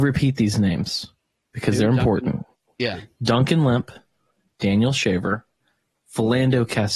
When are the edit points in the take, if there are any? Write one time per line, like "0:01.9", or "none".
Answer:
0:05.9